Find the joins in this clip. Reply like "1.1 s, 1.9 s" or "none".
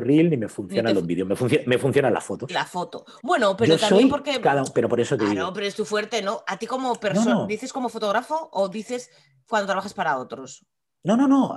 none